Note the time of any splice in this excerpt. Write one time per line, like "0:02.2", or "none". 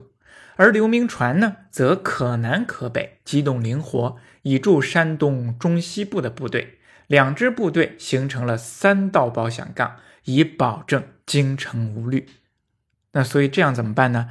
none